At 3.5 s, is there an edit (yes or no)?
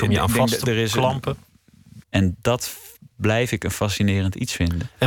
no